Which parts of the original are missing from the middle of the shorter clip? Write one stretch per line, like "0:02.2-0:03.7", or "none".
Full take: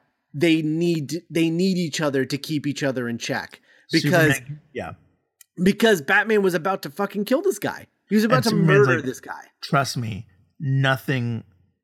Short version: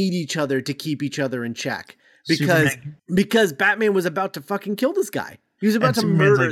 0:04.6-0:05.5